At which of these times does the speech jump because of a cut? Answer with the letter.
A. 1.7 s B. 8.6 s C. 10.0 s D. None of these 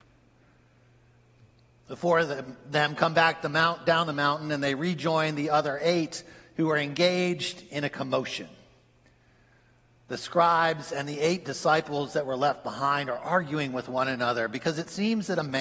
D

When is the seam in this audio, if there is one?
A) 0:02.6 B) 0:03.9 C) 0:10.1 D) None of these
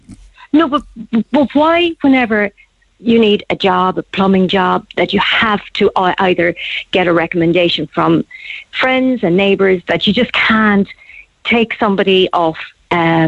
B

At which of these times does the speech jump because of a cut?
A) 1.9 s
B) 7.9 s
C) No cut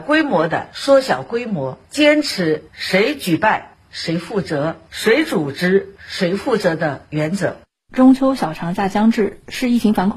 C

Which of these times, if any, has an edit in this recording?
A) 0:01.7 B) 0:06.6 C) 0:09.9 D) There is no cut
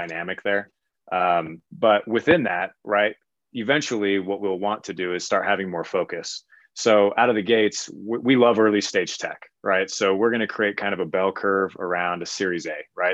A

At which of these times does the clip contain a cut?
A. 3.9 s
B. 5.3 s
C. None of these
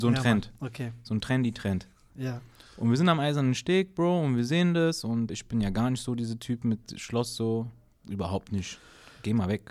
B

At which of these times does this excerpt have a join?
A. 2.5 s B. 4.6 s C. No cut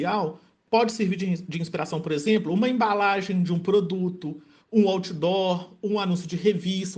C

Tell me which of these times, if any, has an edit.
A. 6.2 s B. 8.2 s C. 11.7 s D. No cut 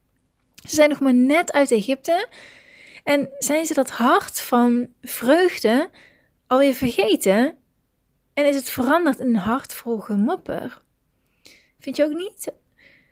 C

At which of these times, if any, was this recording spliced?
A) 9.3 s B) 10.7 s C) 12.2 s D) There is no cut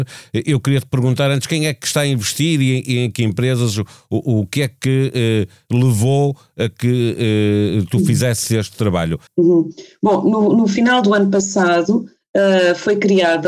A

